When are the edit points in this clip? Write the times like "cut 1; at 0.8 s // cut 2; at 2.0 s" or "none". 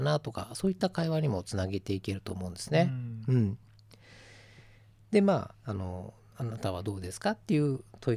cut 1; at 5.5 s

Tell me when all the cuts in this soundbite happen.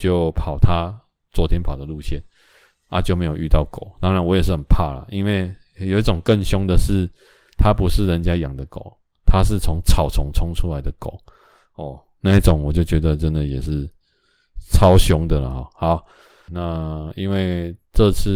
cut 1; at 16.5 s

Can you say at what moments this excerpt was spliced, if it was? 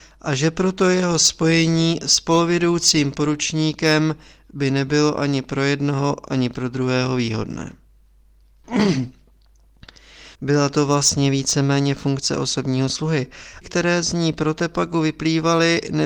cut 1; at 10.3 s // cut 2; at 13.6 s

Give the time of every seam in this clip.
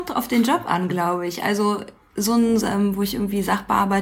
cut 1; at 2.6 s

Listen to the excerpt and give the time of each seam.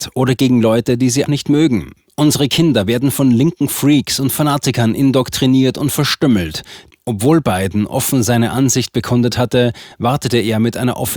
cut 1; at 1.3 s // cut 2; at 6.9 s // cut 3; at 9.9 s

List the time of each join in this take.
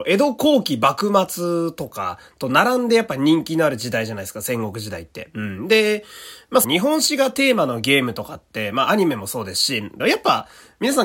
cut 1; at 6.6 s // cut 2; at 10.0 s

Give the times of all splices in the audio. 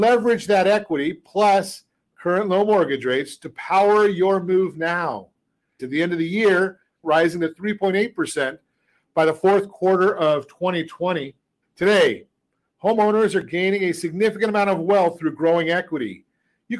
cut 1; at 5.8 s // cut 2; at 7.0 s // cut 3; at 11.6 s

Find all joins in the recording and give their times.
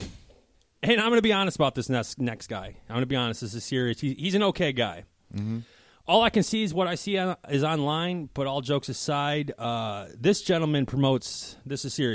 none

